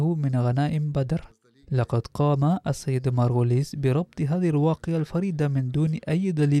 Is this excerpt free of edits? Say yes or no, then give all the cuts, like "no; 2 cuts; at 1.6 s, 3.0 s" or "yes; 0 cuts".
yes; 0 cuts